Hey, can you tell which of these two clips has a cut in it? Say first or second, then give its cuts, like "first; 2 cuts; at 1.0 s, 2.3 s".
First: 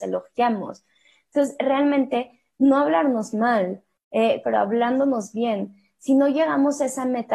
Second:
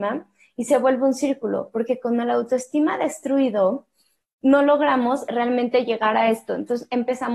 first; 1 cut; at 4.4 s